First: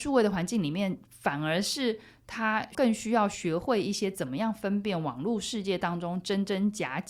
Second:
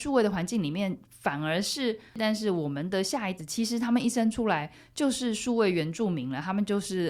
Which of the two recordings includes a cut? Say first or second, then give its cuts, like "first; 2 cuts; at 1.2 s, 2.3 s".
second; 2 cuts; at 2.1 s, 3.4 s